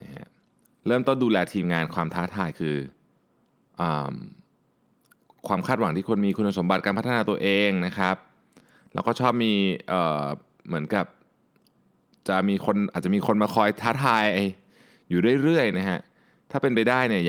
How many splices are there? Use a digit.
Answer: 0